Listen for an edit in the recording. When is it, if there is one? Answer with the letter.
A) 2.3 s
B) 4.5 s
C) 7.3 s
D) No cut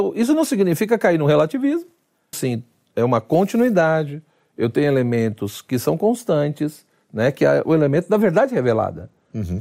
A